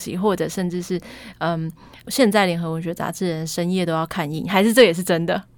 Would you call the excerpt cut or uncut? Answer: uncut